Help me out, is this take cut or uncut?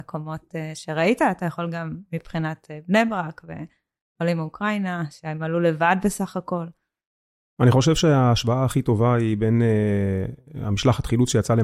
uncut